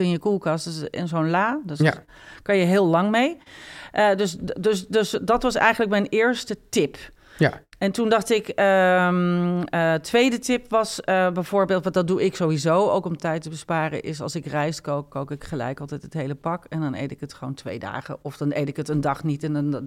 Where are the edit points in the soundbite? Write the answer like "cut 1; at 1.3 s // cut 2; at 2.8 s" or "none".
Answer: none